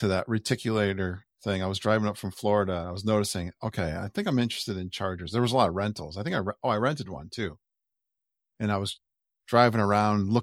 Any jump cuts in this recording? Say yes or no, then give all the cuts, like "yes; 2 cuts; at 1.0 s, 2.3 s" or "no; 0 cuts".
no; 0 cuts